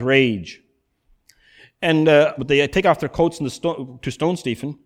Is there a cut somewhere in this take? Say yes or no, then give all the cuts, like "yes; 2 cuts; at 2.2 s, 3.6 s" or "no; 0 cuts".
yes; 1 cut; at 2.4 s